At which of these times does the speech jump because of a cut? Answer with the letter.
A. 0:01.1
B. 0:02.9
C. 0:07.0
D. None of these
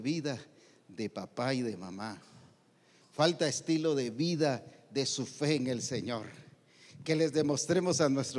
D